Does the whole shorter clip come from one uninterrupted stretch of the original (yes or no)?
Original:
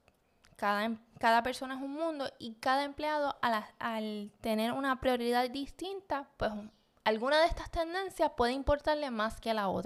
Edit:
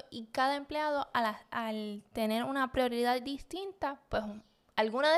yes